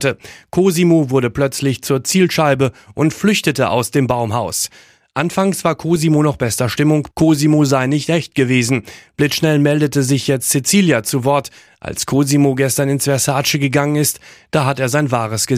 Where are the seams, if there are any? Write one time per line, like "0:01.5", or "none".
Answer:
0:07.1